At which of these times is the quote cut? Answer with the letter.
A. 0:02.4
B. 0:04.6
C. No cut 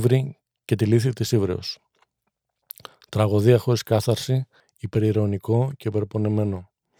B